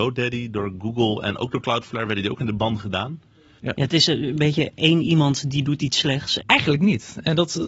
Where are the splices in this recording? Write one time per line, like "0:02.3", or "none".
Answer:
0:03.6
0:06.4